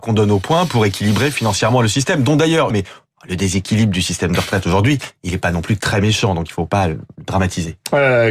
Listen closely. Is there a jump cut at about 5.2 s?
no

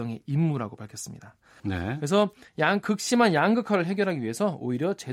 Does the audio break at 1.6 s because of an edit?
yes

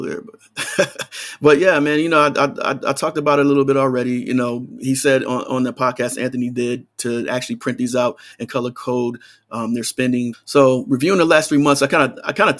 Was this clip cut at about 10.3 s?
yes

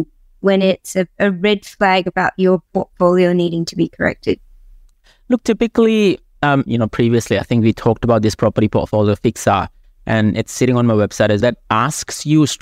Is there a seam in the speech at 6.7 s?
yes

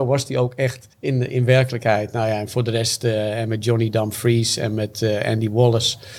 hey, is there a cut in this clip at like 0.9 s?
yes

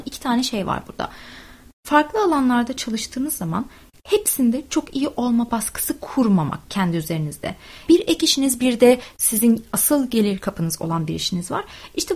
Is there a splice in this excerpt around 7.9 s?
yes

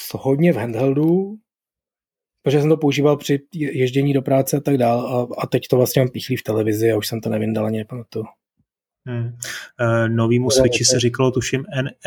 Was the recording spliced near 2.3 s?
no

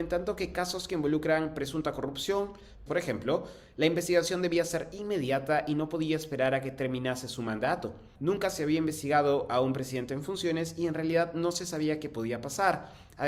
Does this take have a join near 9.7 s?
no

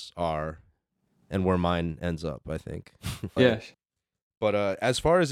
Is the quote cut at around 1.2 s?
yes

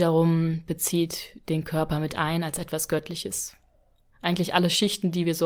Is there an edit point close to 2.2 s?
no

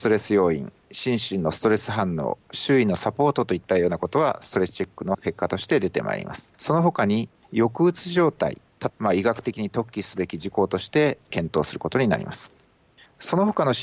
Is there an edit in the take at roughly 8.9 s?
yes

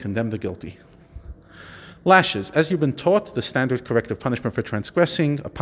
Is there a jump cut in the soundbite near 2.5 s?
no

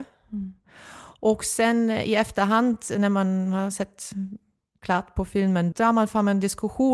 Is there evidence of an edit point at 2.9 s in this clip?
no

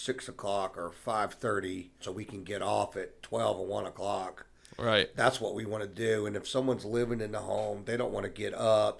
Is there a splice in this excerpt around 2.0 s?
yes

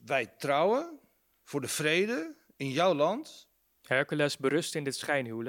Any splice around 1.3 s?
yes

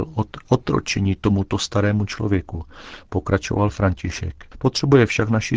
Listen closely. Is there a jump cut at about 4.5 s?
yes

